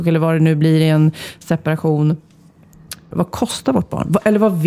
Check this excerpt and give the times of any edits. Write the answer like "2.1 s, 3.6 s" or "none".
3.1 s